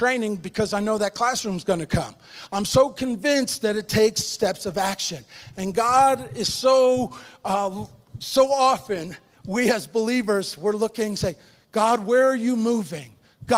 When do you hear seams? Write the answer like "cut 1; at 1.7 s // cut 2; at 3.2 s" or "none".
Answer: none

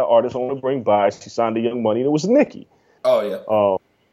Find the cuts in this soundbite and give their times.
cut 1; at 3.0 s

